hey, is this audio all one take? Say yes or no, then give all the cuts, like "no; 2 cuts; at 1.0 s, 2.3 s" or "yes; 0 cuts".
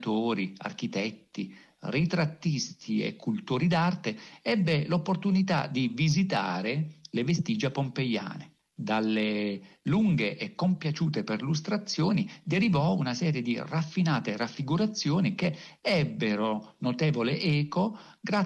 yes; 0 cuts